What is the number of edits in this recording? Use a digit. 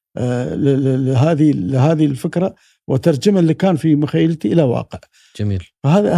0